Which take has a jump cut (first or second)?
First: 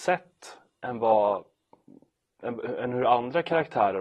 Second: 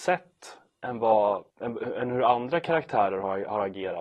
second